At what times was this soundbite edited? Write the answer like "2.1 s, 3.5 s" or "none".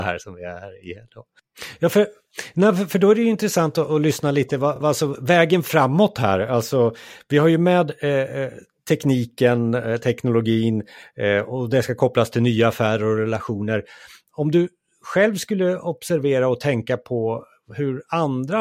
none